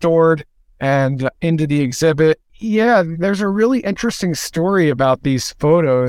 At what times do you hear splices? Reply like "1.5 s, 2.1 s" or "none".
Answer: 2.5 s